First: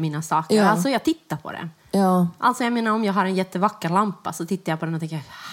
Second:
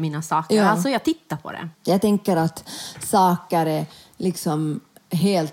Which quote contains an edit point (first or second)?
second